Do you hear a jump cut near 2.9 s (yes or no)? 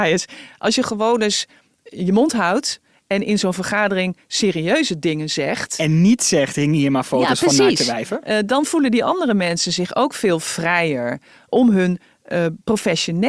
no